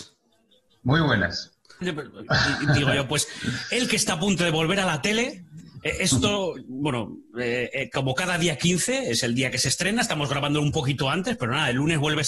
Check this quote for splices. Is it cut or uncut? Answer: cut